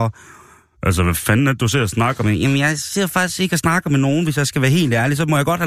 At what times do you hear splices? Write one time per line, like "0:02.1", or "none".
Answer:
none